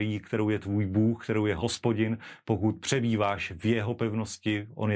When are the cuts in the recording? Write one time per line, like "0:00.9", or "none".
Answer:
none